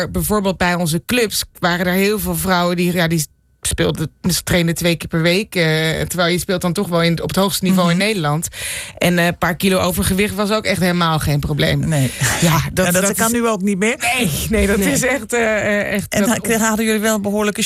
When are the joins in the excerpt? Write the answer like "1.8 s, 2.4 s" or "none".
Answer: none